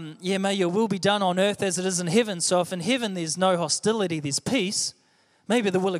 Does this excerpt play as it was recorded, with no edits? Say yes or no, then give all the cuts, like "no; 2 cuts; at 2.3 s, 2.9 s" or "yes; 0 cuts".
yes; 0 cuts